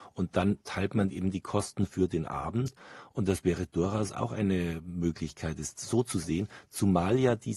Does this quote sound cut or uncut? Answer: uncut